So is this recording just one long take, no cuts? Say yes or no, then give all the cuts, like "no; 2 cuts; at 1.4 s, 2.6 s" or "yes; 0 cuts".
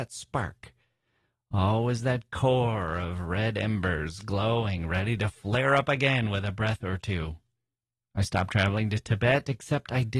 yes; 0 cuts